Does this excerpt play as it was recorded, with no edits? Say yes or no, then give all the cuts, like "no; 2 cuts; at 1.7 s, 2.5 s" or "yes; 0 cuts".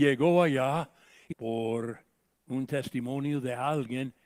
no; 1 cut; at 1.3 s